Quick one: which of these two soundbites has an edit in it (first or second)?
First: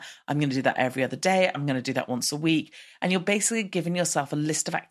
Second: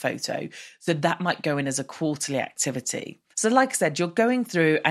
second